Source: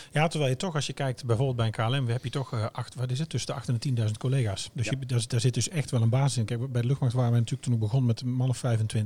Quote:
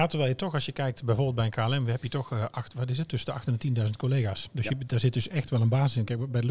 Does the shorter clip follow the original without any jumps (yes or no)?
no